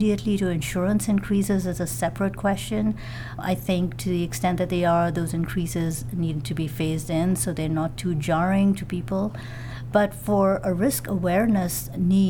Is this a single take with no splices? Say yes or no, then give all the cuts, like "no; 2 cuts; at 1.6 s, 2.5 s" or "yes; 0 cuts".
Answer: yes; 0 cuts